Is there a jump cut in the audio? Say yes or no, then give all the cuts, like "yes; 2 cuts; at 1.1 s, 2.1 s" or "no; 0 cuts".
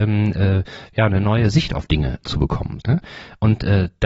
yes; 1 cut; at 2.8 s